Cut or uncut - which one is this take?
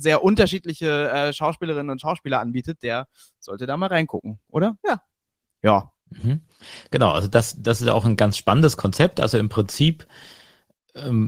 cut